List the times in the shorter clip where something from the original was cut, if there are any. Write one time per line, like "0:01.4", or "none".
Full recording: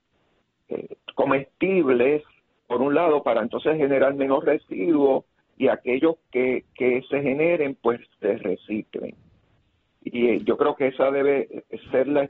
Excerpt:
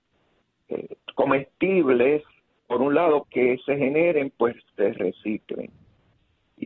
0:03.2